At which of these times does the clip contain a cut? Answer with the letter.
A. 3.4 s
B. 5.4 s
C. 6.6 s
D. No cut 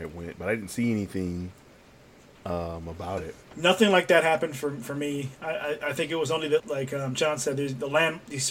C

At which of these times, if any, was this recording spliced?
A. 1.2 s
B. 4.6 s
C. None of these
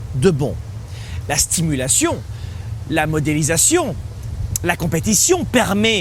A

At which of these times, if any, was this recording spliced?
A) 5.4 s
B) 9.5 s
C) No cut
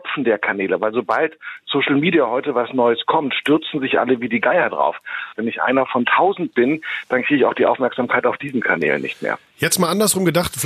A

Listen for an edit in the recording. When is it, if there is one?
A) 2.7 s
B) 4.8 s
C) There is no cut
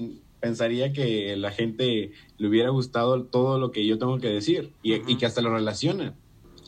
B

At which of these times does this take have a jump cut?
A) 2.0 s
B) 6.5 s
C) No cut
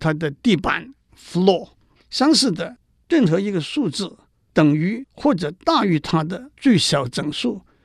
A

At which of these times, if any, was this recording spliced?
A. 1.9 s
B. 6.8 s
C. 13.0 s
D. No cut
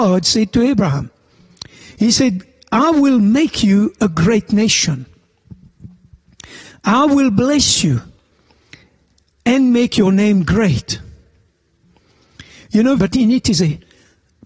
C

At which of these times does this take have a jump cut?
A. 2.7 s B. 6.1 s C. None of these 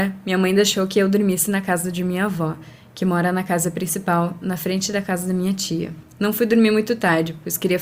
C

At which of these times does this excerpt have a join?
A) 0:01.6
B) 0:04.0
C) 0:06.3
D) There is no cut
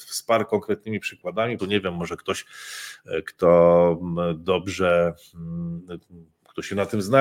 A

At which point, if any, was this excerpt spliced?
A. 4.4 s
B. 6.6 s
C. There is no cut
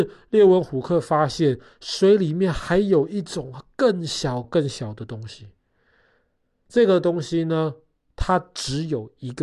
A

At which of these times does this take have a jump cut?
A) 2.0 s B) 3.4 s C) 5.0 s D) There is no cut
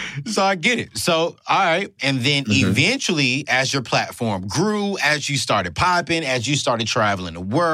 A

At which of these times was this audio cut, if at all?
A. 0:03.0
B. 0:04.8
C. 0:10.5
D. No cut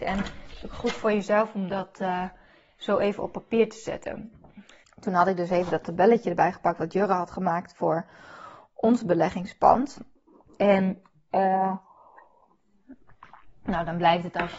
B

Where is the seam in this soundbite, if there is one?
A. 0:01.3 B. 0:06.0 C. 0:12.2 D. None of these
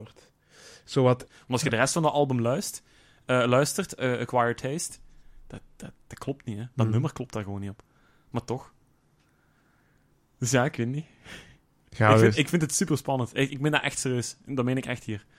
A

